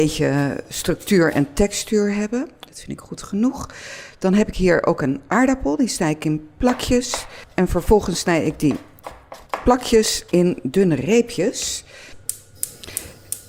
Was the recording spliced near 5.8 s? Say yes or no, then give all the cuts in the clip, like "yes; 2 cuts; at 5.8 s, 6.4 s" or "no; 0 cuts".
no; 1 cut; at 2.7 s